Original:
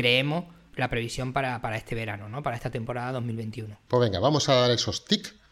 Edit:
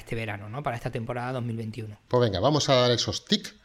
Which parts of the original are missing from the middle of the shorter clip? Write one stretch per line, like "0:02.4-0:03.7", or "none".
none